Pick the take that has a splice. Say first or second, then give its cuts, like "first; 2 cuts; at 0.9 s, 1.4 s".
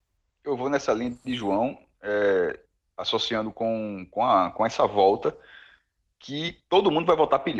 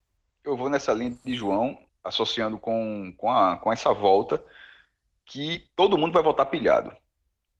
second; 1 cut; at 1.9 s